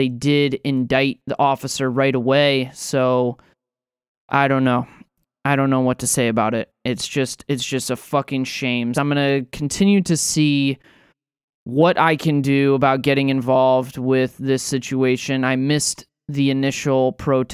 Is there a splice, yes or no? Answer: yes